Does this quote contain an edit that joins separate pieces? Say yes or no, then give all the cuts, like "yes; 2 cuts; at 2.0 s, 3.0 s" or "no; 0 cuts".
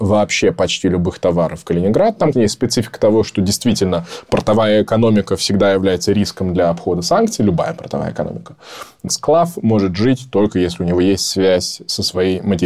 yes; 2 cuts; at 2.3 s, 9.1 s